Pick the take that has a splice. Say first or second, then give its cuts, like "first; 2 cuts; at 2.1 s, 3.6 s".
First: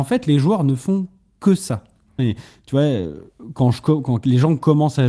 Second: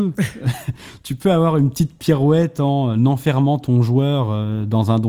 first; 1 cut; at 2.2 s